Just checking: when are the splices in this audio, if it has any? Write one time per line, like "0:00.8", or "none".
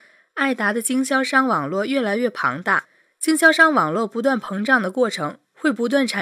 none